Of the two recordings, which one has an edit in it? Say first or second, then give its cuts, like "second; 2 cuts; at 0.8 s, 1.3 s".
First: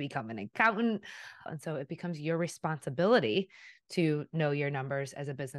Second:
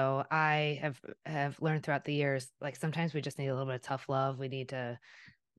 first; 1 cut; at 1.5 s